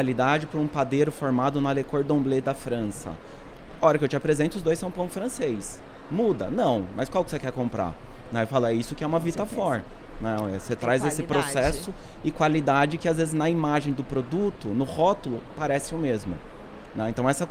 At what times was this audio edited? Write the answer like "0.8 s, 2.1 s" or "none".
none